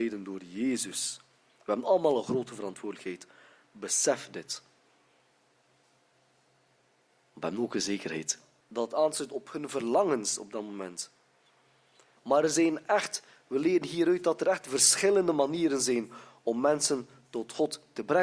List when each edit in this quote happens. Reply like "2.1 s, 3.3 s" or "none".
8.6 s, 12.2 s